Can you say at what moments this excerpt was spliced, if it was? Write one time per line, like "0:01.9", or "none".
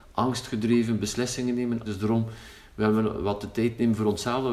0:01.8